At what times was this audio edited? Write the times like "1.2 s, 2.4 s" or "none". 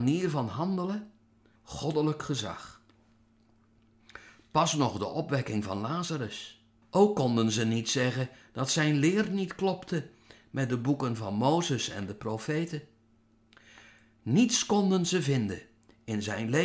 1.6 s, 6.8 s